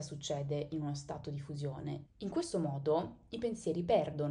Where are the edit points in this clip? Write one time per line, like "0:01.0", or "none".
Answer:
0:02.1

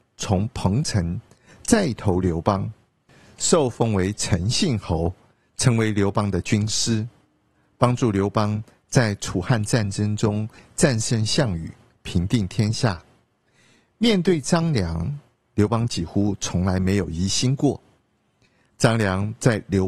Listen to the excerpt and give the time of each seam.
none

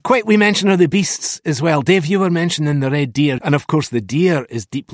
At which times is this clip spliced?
0:03.4

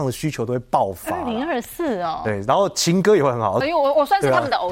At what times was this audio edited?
0:03.6

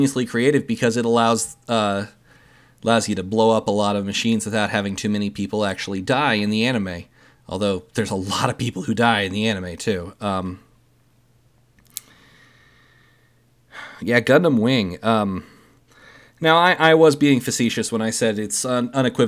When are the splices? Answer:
none

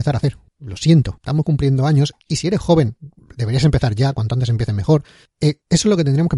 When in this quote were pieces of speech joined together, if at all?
none

